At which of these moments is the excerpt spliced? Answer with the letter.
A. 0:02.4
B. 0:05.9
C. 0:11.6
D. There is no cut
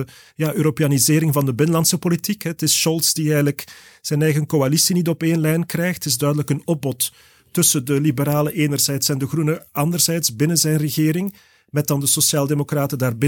D